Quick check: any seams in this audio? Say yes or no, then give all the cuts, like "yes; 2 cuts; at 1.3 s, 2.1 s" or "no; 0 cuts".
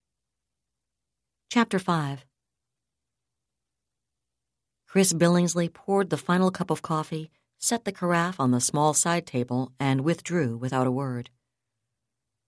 no; 0 cuts